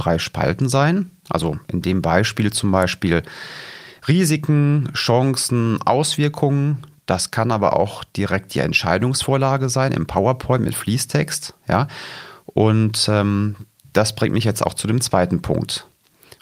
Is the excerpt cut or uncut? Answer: uncut